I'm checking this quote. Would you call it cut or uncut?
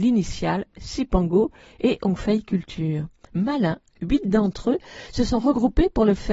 cut